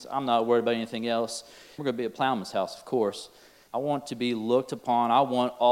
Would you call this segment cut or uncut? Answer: cut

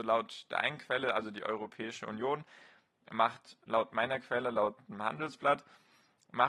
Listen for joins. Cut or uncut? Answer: uncut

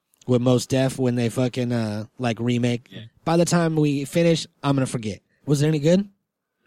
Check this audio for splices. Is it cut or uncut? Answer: cut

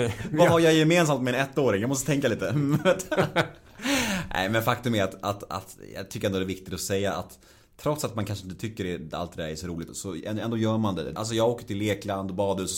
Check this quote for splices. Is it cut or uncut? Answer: cut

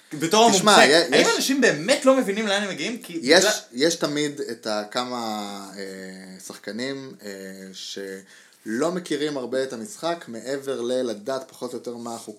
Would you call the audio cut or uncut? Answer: uncut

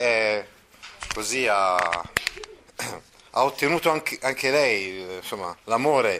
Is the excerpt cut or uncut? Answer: uncut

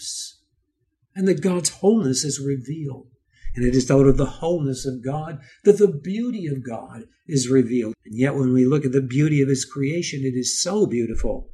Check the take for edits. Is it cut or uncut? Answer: cut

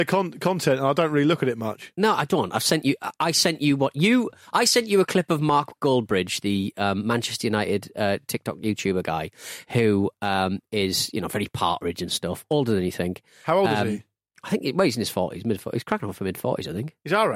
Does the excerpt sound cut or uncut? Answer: uncut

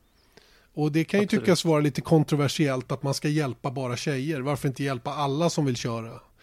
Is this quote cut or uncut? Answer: uncut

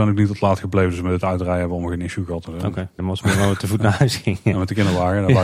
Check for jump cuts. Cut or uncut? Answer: cut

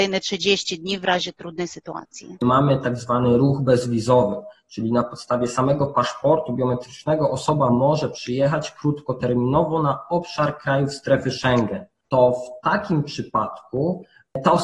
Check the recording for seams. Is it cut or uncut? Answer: cut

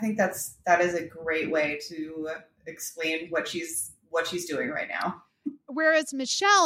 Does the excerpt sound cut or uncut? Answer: uncut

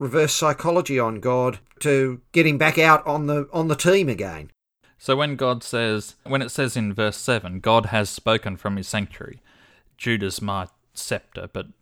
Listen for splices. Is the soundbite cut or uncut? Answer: cut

